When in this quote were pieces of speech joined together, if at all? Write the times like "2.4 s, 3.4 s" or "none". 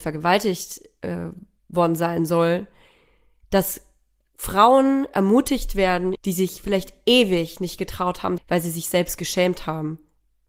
6.1 s, 8.4 s